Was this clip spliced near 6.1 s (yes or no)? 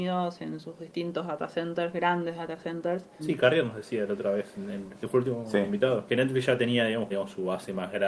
yes